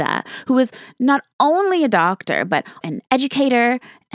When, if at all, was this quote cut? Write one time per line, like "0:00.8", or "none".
0:02.8